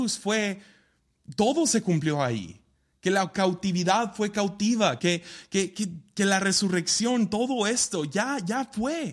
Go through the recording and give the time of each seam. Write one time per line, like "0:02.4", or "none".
0:05.0

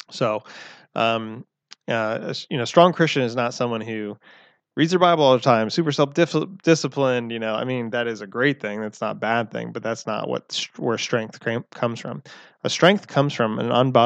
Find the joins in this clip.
none

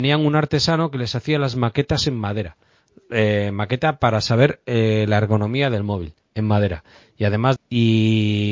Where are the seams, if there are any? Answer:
0:07.6

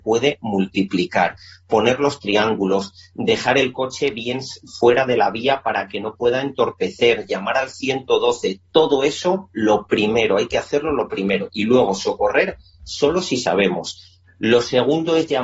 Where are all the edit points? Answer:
0:14.3

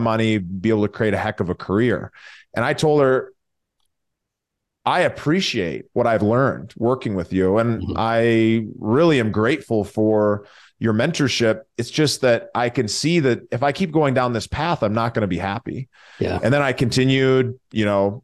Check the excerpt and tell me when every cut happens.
none

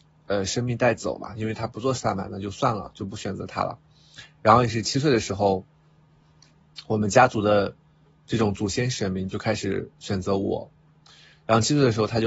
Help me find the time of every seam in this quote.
none

